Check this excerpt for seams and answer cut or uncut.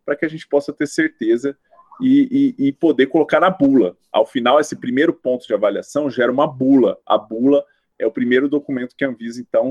uncut